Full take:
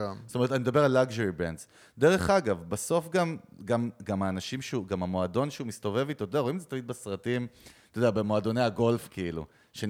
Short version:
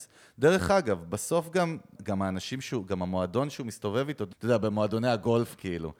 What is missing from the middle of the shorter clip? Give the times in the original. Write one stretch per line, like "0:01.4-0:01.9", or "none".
0:03.5-0:04.0
0:06.3-0:07.9